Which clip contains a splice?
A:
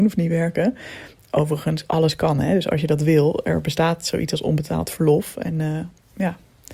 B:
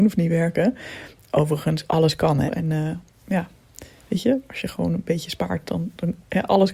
B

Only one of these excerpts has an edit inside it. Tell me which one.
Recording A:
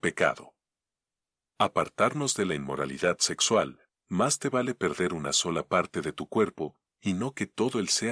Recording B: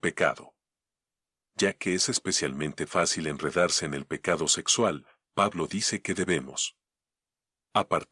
A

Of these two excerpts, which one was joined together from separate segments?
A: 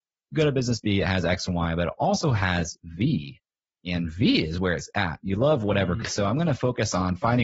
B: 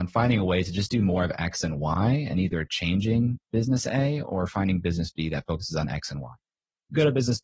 A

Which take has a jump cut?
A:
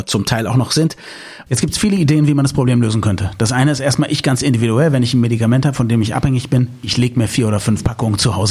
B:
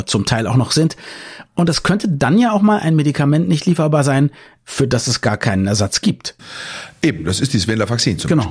A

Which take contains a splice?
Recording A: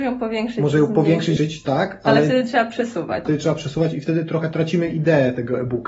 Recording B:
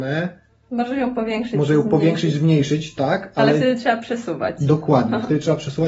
A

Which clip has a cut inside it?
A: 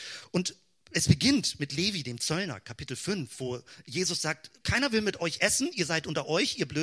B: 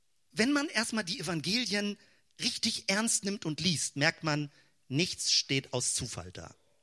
A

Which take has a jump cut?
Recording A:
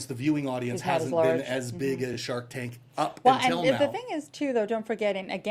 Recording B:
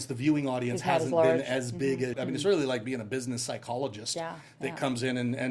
B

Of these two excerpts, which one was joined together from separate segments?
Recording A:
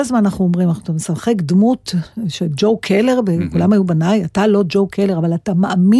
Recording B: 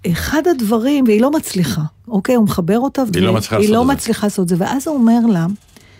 B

